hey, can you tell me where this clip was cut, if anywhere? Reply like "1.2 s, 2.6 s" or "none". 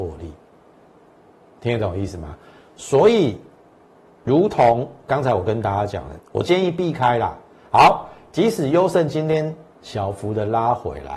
6.2 s, 7.6 s